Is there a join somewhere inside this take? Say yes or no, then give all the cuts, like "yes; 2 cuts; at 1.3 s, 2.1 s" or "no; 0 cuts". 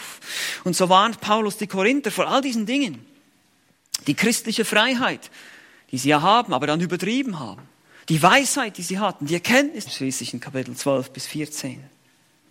yes; 1 cut; at 9.9 s